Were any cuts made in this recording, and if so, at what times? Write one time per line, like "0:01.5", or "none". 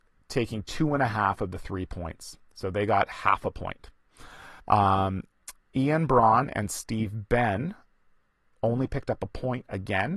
0:04.6

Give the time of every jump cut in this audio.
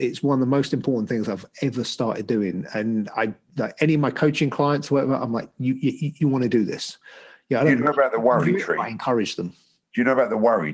none

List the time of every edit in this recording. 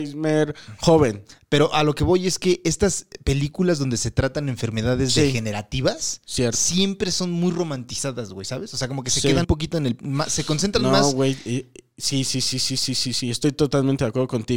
0:09.4

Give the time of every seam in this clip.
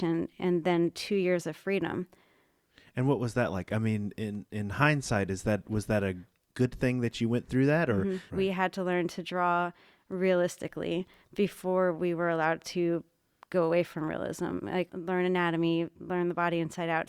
0:08.3
0:14.9

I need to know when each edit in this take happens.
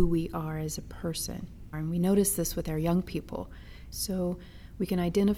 0:01.7
0:03.9

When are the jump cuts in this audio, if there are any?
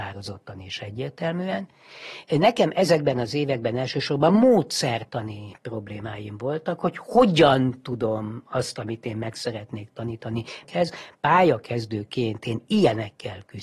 0:10.6

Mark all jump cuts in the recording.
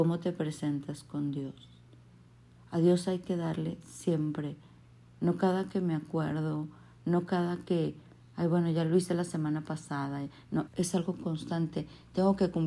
0:10.7

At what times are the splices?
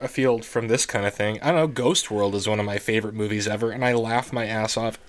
none

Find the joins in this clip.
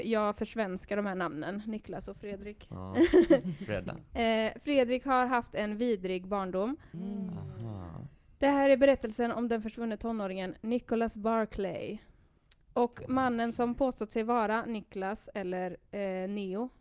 0:06.9

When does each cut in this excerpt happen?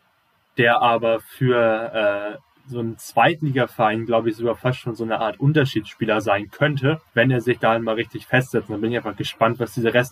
0:07.1

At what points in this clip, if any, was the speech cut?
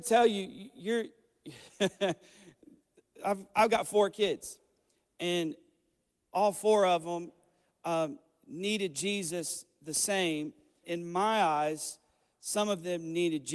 0:10.8

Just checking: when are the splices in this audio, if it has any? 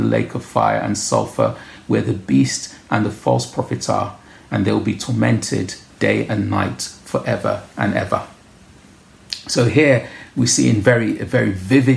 none

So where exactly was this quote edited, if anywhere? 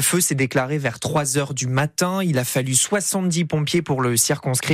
none

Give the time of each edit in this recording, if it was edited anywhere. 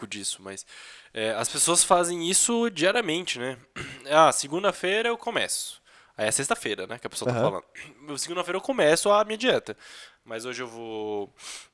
none

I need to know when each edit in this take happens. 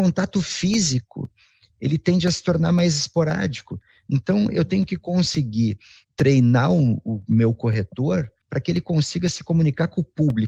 0:06.0
0:08.4

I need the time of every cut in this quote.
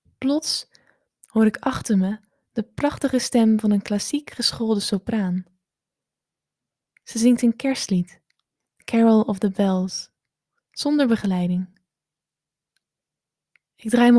none

